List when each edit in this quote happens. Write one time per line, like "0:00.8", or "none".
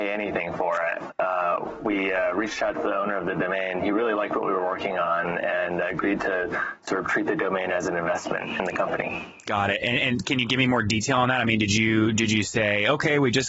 0:01.1